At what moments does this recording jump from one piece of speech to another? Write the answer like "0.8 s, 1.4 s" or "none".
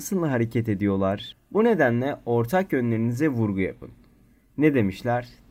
1.3 s